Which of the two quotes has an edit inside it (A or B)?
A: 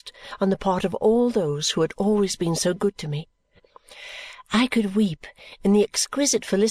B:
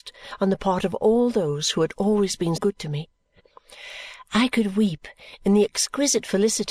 B